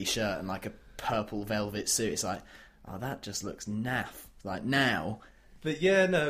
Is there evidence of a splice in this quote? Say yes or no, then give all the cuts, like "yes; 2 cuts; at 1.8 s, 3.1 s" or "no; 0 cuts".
no; 0 cuts